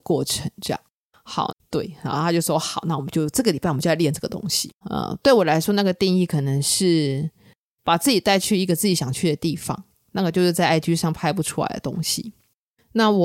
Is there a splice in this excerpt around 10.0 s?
no; 2 cuts; at 1.5 s, 4.8 s

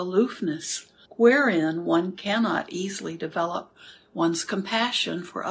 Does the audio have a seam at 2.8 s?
no; 1 cut; at 1.1 s

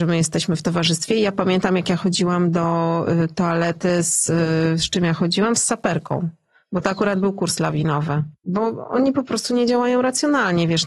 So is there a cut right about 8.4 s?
yes; 1 cut; at 8.4 s

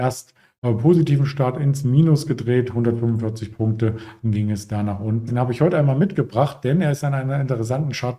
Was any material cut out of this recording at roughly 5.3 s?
yes; 1 cut; at 5.3 s

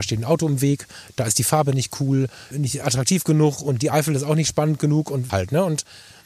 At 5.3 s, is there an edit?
yes; 2 cuts; at 2.5 s, 5.3 s

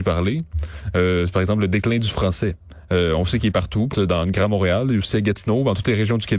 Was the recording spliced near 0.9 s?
no; 1 cut; at 3.9 s

